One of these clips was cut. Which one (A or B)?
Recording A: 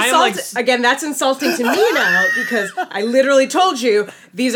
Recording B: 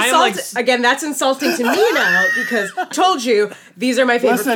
B